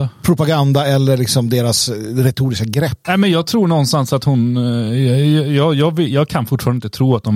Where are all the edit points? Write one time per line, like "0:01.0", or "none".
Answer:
0:03.0